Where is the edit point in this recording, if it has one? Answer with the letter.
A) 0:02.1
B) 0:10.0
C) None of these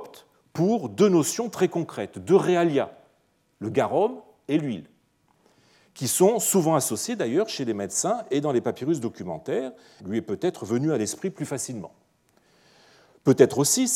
B